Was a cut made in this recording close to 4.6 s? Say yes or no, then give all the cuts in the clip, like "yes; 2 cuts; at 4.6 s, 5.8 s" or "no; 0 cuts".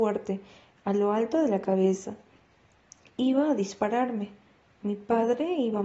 no; 0 cuts